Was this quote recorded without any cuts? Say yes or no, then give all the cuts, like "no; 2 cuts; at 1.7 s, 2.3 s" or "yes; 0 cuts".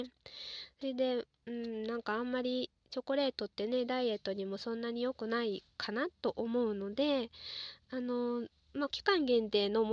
no; 1 cut; at 8.9 s